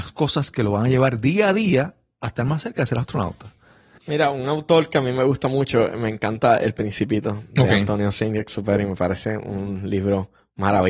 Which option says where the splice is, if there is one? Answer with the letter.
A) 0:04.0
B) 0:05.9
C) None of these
A